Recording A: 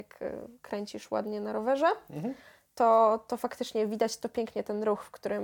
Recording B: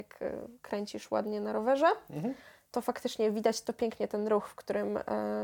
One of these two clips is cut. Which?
B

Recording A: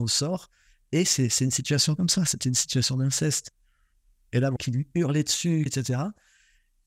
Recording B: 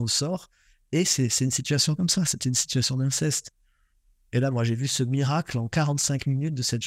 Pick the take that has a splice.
A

